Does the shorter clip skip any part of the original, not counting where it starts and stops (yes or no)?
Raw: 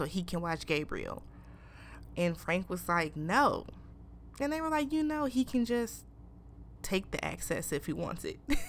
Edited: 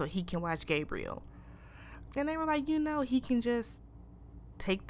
yes